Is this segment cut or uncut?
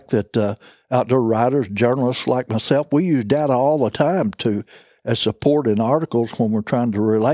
uncut